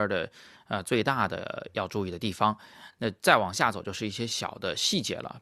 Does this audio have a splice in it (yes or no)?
no